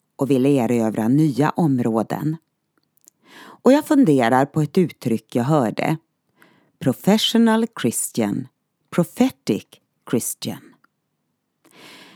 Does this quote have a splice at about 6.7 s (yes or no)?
no